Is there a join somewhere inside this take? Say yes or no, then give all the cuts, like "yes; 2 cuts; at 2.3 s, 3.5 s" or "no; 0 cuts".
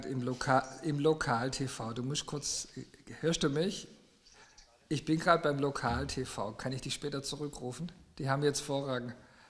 no; 0 cuts